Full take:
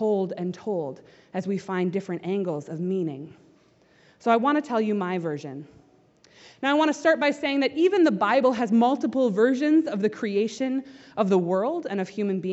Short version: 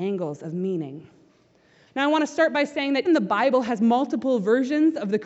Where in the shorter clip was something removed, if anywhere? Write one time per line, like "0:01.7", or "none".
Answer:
0:01.9
0:03.1